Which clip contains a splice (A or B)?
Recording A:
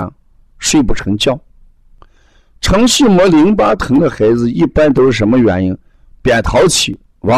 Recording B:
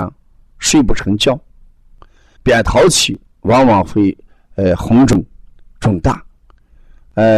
B